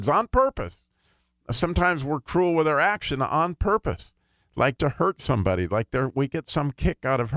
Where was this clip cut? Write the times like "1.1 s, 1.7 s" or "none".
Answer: 4.8 s